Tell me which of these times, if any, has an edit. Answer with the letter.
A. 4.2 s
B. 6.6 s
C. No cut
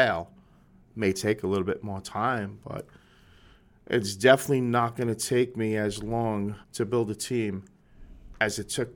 B